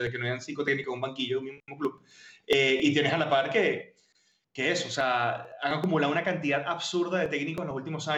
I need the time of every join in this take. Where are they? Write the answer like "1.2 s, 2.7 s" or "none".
none